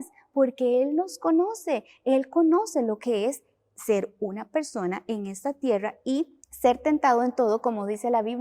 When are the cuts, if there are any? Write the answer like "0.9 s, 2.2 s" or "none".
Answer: 6.4 s